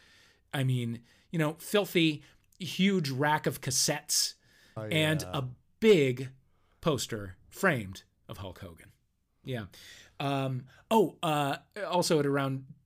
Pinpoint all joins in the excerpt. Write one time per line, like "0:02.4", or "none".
0:04.8
0:09.4